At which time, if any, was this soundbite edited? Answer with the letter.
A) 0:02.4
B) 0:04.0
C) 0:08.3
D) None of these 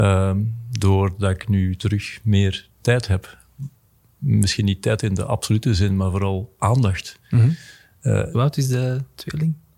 C